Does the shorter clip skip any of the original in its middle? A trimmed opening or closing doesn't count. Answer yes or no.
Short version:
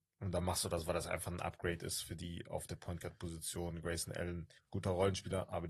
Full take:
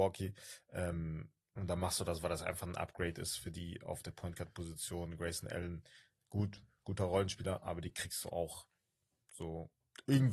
yes